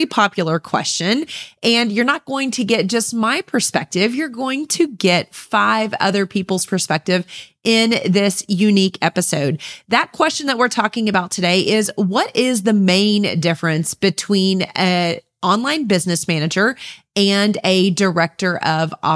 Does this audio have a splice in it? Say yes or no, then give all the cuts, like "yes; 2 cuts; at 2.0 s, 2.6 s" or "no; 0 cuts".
no; 0 cuts